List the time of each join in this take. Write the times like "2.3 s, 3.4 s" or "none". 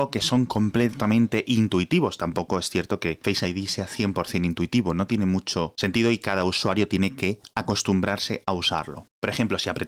none